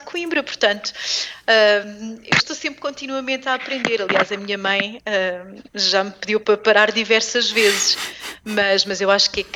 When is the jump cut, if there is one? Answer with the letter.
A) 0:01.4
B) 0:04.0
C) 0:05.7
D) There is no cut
D